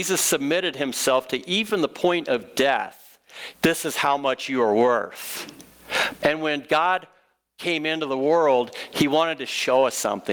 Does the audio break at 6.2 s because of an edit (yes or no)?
yes